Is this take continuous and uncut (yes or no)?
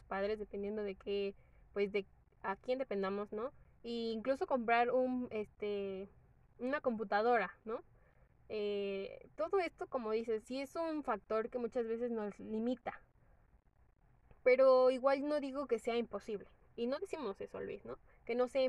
no